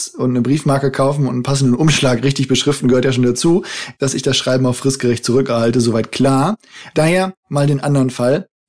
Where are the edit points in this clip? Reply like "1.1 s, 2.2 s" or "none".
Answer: 4.0 s, 6.9 s